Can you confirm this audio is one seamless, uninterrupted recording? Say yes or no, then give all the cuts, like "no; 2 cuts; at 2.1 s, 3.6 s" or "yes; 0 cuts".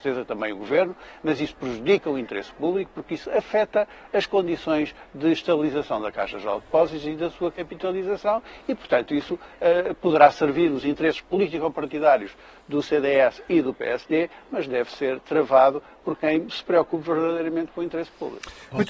yes; 0 cuts